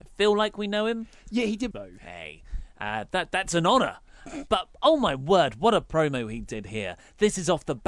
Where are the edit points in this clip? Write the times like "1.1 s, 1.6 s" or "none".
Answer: 1.7 s